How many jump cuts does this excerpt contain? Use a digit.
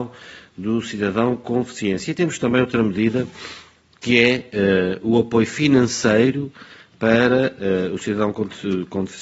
0